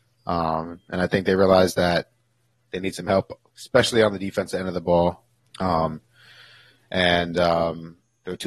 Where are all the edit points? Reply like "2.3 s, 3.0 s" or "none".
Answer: 5.4 s